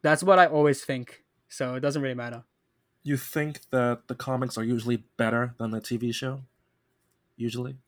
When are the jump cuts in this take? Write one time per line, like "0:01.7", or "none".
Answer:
none